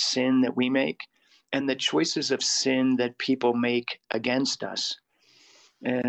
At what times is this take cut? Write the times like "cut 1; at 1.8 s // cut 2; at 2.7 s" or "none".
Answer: cut 1; at 1.6 s